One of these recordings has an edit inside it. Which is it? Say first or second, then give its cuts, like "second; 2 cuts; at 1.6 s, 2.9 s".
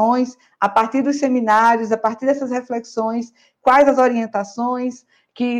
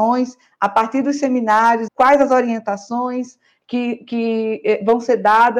second; 1 cut; at 1.9 s